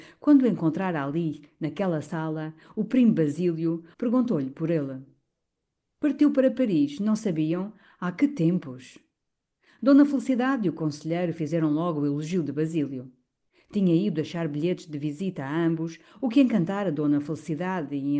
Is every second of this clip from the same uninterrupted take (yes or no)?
no